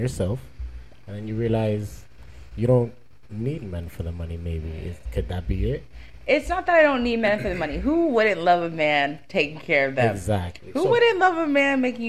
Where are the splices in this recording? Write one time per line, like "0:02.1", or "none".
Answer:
none